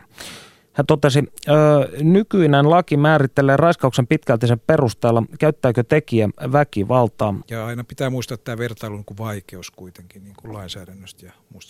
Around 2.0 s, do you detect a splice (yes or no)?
no